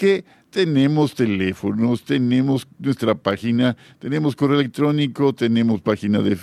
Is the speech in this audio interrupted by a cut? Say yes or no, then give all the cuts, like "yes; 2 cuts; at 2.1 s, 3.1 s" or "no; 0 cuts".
no; 0 cuts